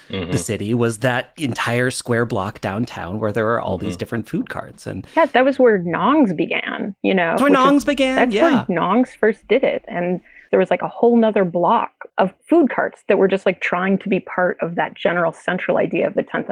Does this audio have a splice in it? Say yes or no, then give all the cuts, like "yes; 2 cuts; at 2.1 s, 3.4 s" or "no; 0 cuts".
yes; 1 cut; at 7.4 s